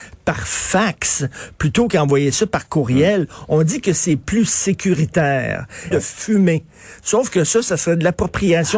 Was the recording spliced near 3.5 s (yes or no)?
no